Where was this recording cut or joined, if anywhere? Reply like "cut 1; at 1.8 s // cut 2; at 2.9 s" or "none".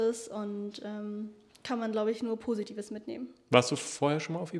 none